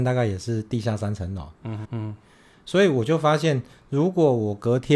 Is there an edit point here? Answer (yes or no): yes